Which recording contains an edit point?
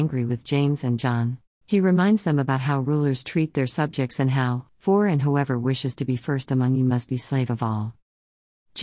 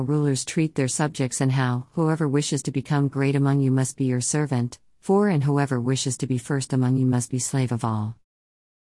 first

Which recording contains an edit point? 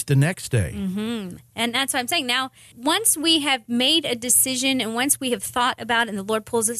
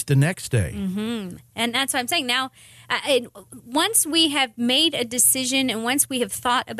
first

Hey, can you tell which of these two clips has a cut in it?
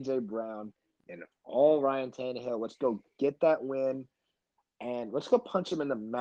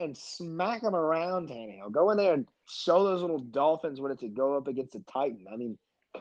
second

